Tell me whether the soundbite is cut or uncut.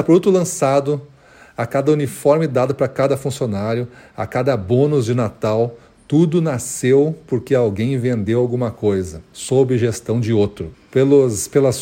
cut